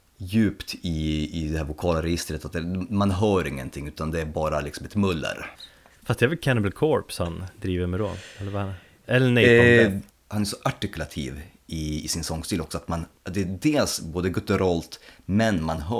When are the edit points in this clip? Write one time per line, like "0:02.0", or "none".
0:05.5
0:10.1
0:13.2

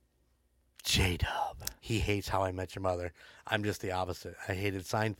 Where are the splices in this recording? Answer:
0:01.8

